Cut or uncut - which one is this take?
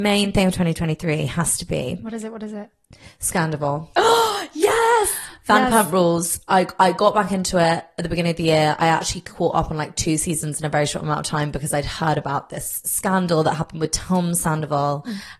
uncut